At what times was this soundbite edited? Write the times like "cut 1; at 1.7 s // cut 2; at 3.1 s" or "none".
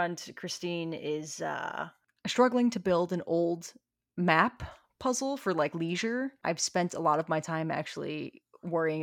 cut 1; at 6.4 s